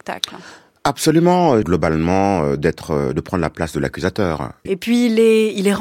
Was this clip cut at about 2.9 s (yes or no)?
no